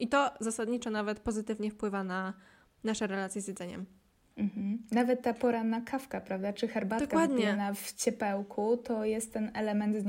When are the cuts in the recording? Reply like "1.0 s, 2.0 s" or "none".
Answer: none